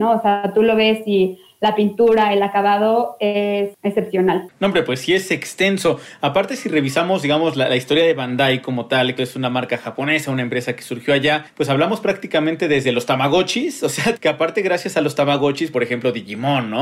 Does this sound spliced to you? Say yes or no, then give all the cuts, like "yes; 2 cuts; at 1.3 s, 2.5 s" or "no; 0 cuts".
yes; 3 cuts; at 9.2 s, 14.1 s, 15.7 s